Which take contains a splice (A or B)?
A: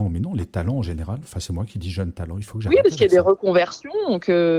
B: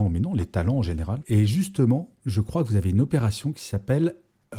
B